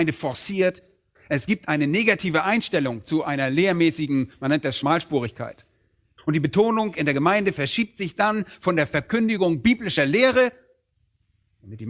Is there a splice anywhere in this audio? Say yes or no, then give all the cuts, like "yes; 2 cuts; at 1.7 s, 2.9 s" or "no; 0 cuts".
yes; 2 cuts; at 1.1 s, 6.2 s